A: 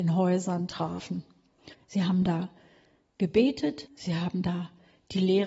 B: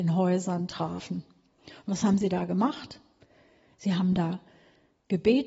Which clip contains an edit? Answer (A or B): A